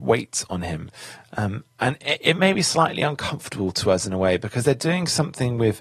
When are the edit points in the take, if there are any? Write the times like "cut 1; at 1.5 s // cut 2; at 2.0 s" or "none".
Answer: none